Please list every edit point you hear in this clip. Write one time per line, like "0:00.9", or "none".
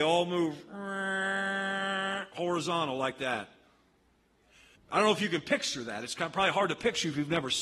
0:04.8